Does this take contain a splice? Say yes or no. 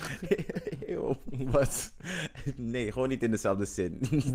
no